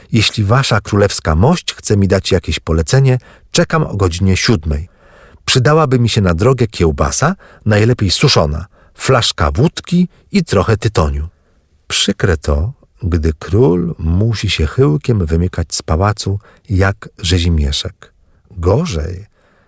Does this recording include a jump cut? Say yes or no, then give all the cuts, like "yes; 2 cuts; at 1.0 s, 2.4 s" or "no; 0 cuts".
no; 0 cuts